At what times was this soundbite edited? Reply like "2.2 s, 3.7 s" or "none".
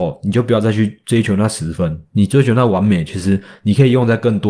none